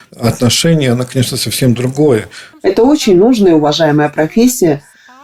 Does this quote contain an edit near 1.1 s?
no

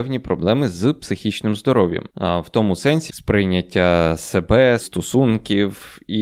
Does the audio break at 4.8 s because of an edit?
yes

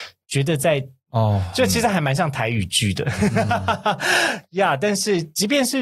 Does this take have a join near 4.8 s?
no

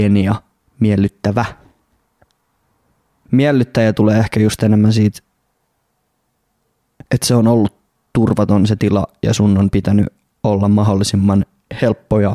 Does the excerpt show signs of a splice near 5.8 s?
no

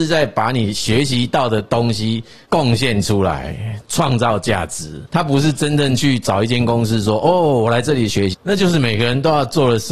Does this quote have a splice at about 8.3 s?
yes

